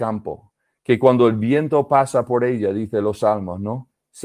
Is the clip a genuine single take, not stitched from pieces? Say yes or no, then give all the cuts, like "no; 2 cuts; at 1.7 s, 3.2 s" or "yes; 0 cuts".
yes; 0 cuts